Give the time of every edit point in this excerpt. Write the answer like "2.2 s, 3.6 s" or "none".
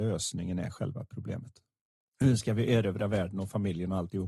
2.0 s